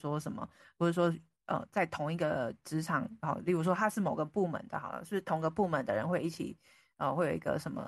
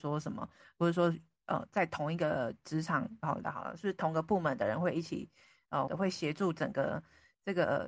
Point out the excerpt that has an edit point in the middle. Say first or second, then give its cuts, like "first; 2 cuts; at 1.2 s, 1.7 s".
second; 2 cuts; at 3.4 s, 5.9 s